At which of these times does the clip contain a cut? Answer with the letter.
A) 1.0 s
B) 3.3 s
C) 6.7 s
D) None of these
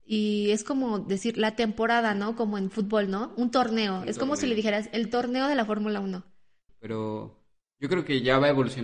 C